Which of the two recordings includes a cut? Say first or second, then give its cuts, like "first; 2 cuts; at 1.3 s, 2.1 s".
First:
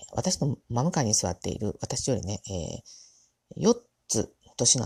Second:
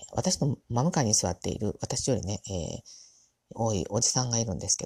second; 1 cut; at 3.5 s